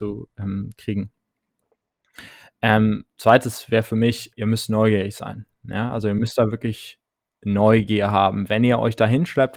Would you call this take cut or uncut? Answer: cut